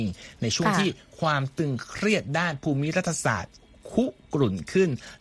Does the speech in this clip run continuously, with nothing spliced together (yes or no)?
yes